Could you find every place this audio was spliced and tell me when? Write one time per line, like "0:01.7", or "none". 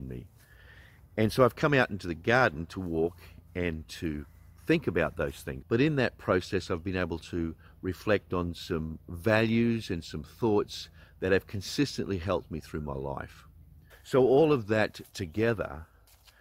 0:05.6
0:13.9

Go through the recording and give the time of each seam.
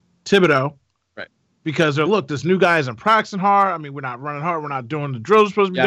0:02.1

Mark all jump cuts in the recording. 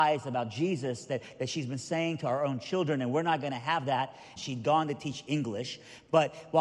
0:04.4

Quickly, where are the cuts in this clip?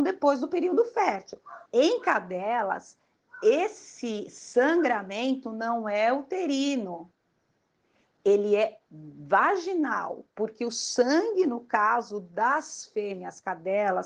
0:01.7

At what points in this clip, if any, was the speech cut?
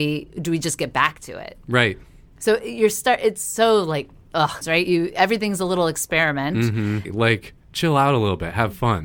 0:04.6
0:07.0

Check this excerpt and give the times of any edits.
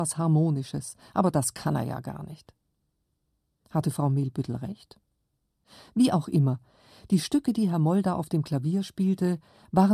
none

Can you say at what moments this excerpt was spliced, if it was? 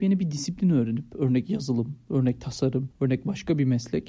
none

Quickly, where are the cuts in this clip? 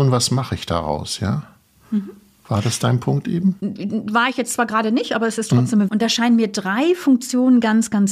0:05.9

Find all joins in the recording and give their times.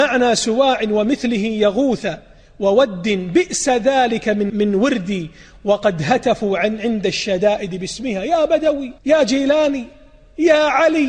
0:04.5
0:09.0

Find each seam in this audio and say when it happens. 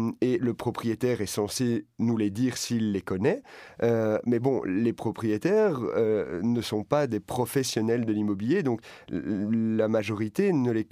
none

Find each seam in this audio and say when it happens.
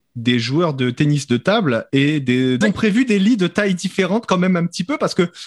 0:02.6

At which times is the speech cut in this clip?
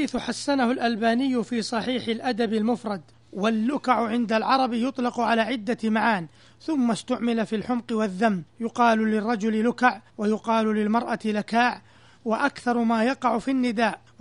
none

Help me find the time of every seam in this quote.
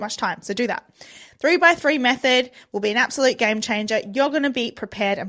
none

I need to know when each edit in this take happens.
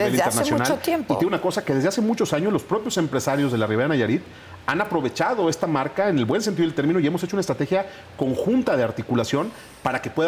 none

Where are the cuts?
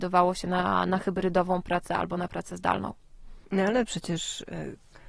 0:03.4

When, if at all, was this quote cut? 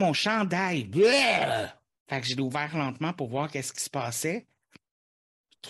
0:01.9

